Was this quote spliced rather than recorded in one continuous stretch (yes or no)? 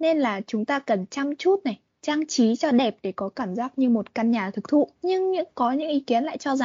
yes